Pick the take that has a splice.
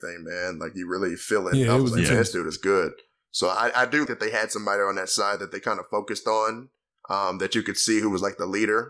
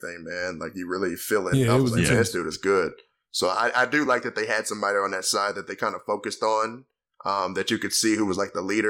first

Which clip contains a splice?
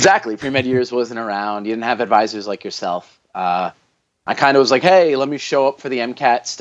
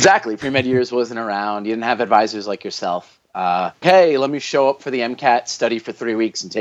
second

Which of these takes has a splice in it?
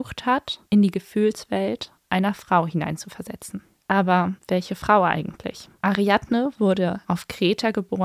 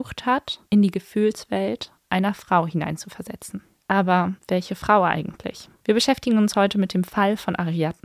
first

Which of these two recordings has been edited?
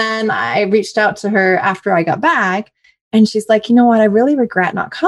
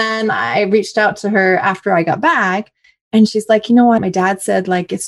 second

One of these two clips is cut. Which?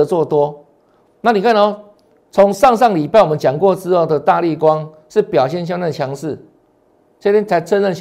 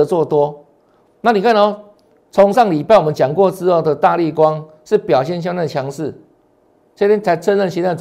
second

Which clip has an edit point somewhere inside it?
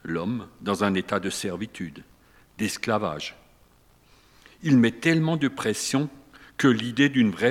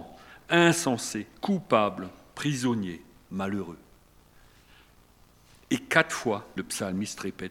second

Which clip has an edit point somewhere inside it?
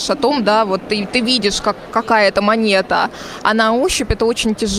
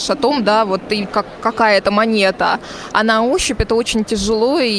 second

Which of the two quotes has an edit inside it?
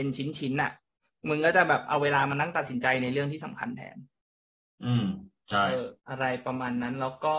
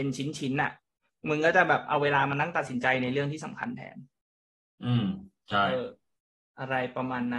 first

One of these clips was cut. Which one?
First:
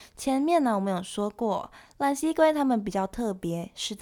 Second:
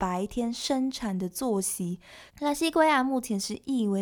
second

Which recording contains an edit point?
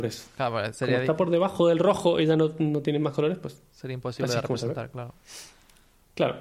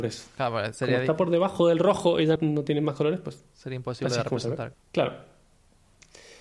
second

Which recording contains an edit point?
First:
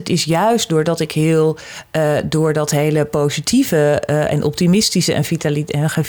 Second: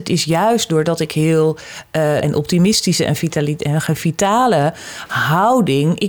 second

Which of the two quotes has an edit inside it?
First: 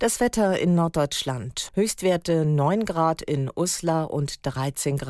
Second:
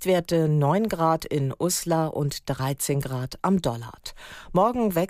first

